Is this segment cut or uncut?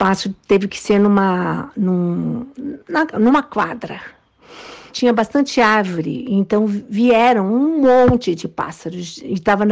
cut